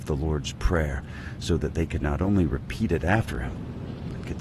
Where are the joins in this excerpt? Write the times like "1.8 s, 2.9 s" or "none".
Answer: none

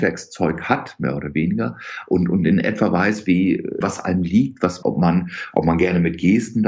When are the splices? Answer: 3.8 s, 4.8 s

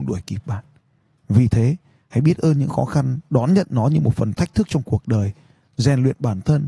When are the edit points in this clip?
none

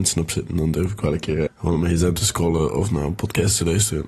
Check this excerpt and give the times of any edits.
1.5 s

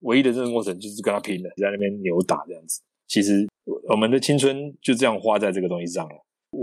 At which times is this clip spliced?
1.6 s, 3.0 s

